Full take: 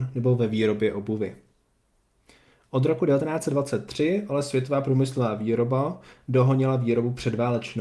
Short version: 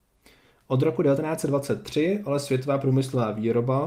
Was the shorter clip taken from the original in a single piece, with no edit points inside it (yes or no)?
yes